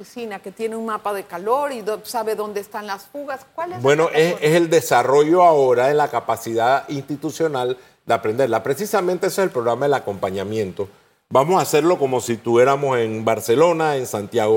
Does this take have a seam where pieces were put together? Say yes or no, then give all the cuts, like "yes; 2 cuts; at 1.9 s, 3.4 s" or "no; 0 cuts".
no; 0 cuts